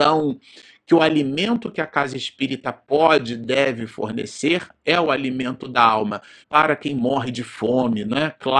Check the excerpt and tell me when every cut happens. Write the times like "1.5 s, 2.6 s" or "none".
6.4 s